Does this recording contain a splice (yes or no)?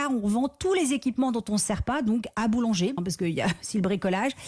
yes